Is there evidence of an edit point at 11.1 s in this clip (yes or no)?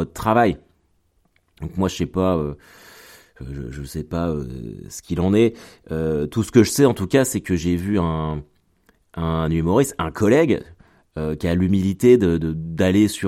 no